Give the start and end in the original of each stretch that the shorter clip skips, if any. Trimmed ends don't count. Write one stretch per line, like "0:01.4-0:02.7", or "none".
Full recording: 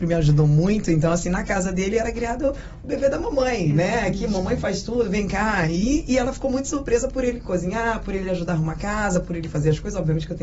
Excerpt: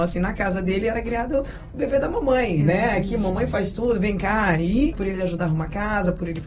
0:06.0-0:08.0